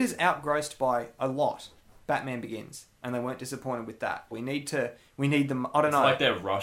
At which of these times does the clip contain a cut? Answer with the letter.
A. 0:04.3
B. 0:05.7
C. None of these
A